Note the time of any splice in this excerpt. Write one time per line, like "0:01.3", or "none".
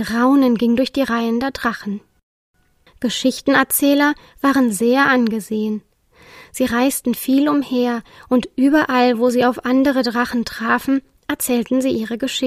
none